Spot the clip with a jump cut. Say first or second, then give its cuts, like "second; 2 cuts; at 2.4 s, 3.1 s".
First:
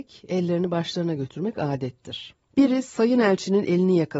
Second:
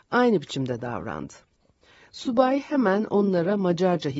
first; 1 cut; at 2.5 s